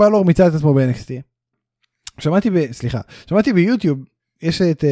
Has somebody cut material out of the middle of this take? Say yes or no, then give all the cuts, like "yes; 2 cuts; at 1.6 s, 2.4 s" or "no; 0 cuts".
yes; 1 cut; at 1.5 s